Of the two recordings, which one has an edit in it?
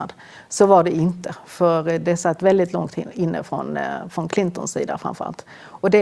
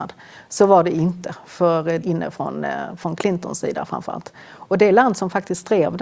second; 1 cut; at 2.0 s

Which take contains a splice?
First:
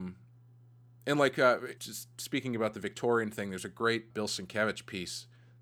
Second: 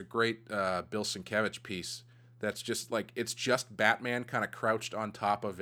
first; 2 cuts; at 1.8 s, 4.1 s

